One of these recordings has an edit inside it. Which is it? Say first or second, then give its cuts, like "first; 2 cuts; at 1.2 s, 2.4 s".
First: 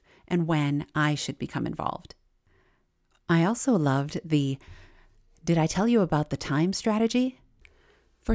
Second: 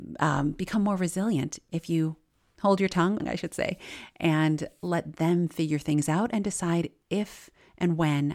second; 1 cut; at 3.2 s